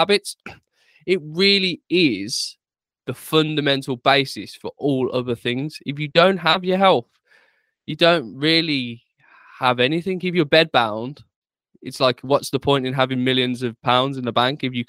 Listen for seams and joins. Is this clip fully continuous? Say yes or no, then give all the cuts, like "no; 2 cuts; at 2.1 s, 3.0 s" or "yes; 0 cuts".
yes; 0 cuts